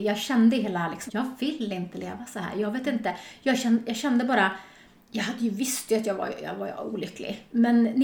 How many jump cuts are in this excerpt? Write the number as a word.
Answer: one